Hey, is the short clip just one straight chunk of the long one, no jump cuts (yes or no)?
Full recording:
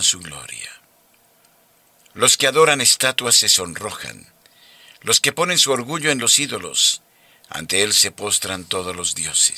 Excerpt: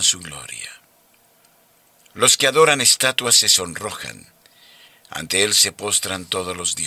no